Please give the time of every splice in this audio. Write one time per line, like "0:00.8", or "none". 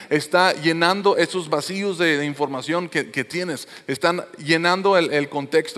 none